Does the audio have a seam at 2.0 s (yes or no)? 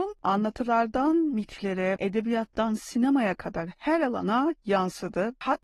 yes